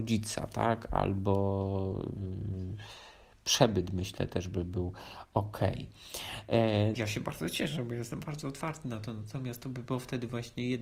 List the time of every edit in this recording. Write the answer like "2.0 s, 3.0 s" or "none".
6.9 s

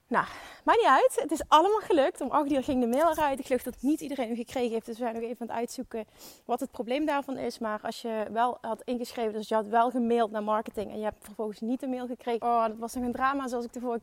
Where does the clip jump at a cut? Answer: 12.4 s

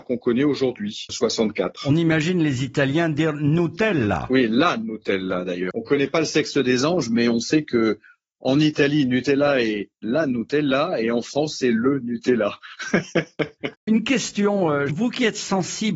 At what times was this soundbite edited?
1.1 s, 13.9 s, 14.9 s

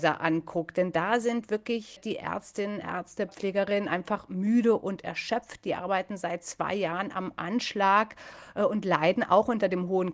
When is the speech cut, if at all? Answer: 2.0 s, 3.3 s

